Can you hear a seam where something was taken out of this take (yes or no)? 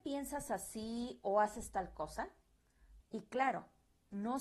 yes